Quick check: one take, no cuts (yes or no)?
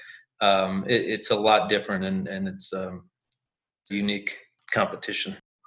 no